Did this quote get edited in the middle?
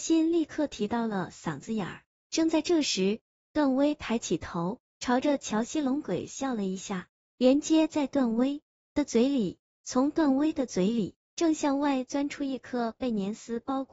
yes; 1 cut; at 7.3 s

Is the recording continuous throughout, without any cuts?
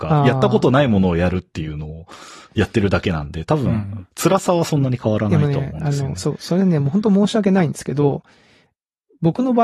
yes; 0 cuts

